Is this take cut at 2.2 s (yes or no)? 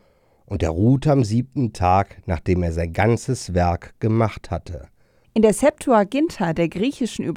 no